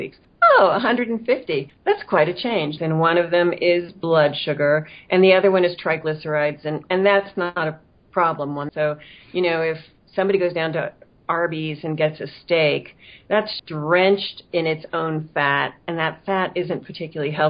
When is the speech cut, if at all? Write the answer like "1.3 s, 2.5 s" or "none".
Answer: 2.8 s, 8.7 s, 13.6 s